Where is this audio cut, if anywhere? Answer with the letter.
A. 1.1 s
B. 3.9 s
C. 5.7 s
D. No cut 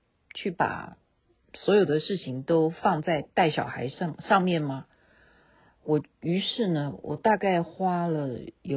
C